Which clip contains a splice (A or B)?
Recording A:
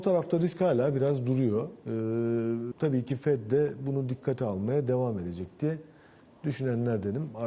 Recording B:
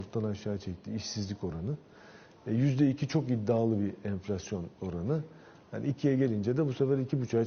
A